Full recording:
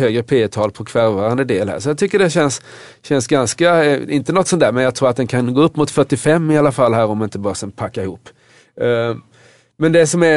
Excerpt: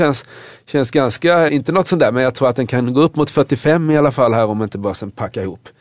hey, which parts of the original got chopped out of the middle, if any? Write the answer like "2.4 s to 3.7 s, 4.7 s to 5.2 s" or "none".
3.8 s to 4.1 s